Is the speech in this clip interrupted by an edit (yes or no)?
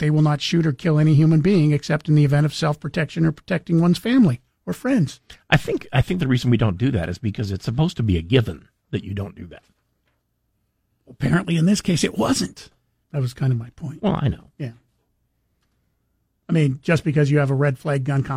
yes